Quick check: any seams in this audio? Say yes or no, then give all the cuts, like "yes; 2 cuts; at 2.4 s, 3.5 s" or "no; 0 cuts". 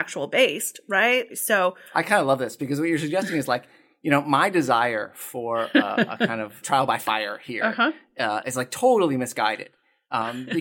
yes; 2 cuts; at 1.3 s, 6.6 s